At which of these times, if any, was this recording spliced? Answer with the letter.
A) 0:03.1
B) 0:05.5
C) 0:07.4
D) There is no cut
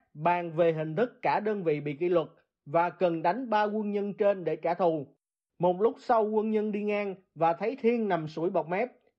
B